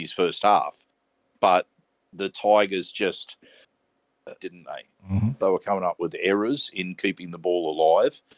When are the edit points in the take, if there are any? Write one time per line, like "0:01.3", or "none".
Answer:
0:04.4
0:05.4